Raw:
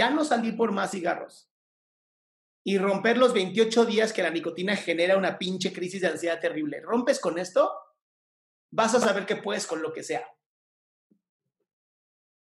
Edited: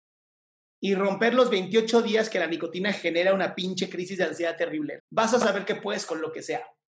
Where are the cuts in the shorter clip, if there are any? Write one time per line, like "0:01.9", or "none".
0:05.0